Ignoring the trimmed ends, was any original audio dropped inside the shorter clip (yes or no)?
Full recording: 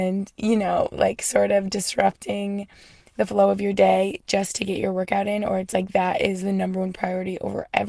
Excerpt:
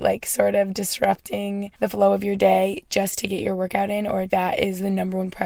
yes